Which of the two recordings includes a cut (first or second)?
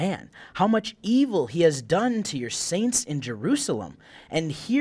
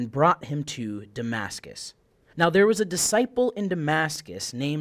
second